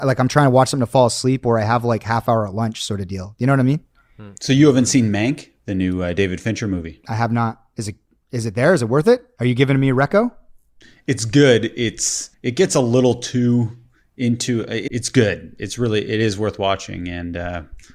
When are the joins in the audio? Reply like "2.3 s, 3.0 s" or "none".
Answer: 12.3 s, 14.9 s